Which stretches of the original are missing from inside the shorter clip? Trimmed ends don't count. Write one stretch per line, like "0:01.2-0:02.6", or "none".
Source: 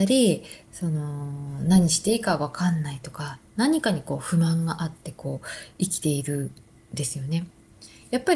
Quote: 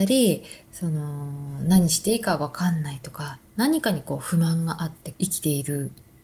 0:05.1-0:05.7